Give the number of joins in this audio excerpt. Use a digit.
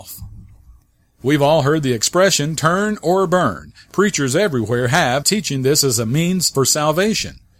1